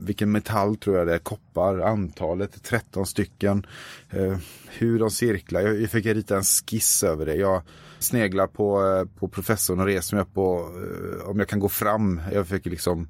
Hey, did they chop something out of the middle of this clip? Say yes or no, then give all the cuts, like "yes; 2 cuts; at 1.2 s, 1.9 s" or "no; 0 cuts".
yes; 1 cut; at 8.0 s